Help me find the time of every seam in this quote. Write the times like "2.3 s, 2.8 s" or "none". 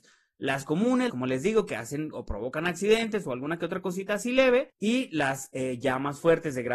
1.1 s